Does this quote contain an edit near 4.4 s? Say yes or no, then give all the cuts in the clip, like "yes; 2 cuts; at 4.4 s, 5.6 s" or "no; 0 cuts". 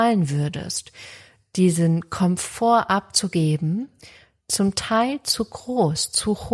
no; 0 cuts